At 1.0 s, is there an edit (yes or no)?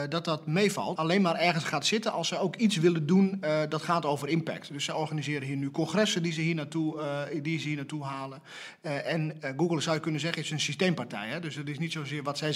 yes